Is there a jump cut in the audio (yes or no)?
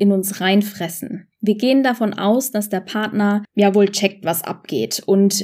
no